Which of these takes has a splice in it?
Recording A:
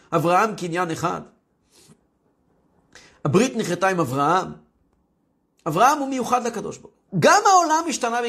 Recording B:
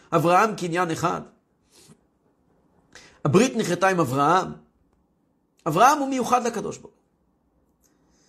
A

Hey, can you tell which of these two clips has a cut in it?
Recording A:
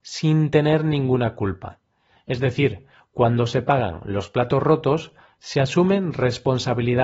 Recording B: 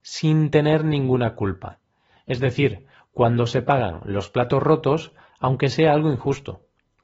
B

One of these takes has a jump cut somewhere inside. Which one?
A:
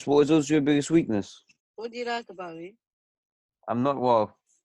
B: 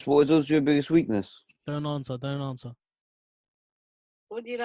A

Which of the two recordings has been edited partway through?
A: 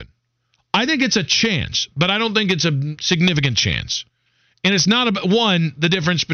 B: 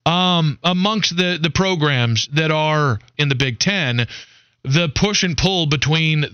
B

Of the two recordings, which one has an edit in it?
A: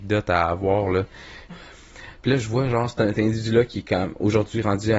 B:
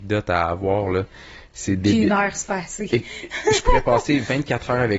A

